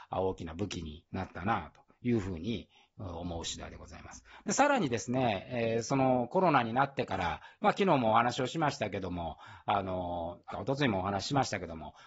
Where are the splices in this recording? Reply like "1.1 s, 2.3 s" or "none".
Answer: 10.5 s